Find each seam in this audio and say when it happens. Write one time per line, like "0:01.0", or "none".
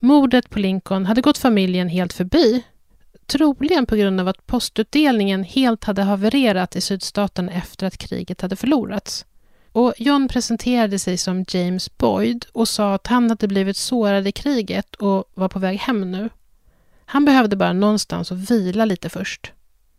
0:09.7